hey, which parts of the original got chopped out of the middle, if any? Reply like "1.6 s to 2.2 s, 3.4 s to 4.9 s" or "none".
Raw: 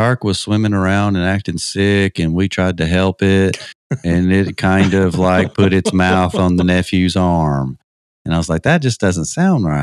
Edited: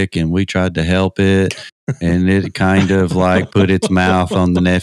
none